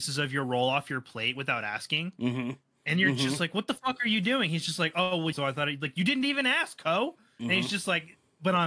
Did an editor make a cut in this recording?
yes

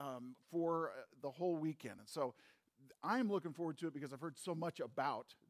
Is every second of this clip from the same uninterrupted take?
yes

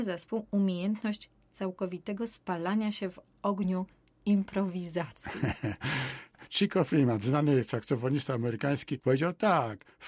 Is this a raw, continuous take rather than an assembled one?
yes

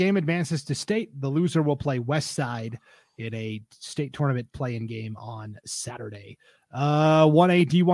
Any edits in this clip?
no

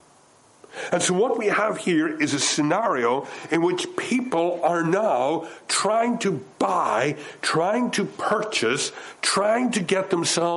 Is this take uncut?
yes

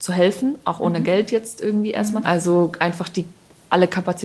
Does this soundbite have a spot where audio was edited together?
yes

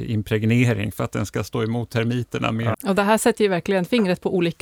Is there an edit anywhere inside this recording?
yes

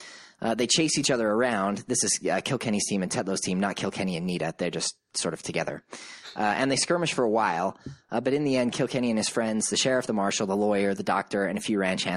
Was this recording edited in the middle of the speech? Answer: no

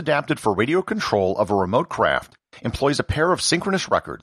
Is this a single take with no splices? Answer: yes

